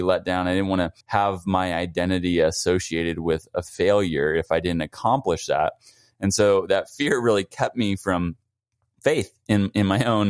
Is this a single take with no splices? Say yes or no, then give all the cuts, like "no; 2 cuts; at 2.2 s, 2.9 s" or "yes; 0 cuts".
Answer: no; 1 cut; at 1.0 s